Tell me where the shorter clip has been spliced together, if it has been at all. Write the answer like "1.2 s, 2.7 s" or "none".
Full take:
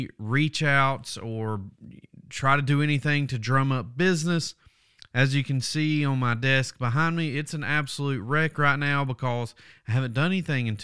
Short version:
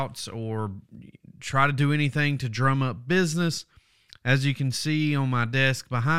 none